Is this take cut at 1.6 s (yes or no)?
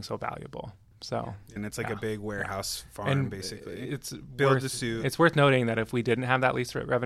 yes